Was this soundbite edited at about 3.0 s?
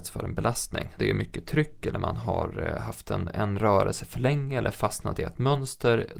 no; 1 cut; at 1.0 s

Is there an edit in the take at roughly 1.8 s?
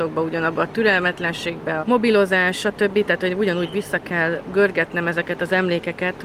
yes; 1 cut; at 1.8 s

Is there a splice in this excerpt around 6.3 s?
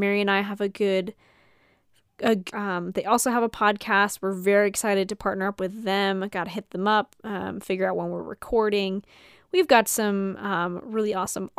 no; 1 cut; at 2.5 s

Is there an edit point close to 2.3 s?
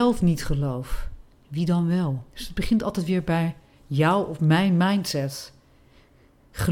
yes; 1 cut; at 2.3 s

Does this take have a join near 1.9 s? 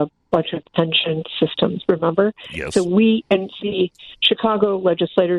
no; 1 cut; at 3.6 s

